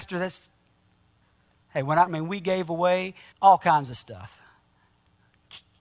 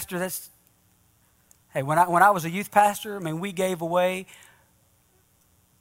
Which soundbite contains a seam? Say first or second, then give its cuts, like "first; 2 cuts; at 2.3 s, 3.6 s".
first; 2 cuts; at 2.1 s, 3.3 s